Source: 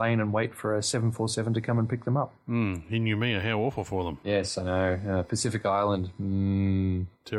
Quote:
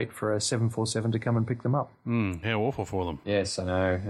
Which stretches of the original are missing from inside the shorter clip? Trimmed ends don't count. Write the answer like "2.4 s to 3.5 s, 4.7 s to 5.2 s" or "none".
2.8 s to 3.4 s